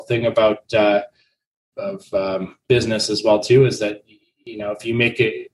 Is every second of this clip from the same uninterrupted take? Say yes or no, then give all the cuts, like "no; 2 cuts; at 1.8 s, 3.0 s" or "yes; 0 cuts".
no; 1 cut; at 1.7 s